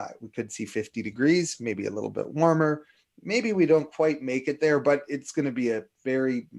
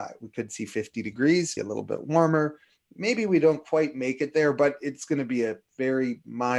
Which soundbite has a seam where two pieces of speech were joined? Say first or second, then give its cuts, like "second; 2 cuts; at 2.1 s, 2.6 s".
second; 1 cut; at 1.6 s